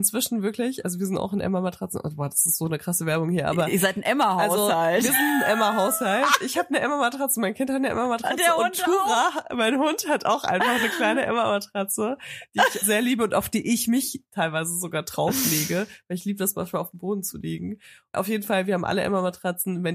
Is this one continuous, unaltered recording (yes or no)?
no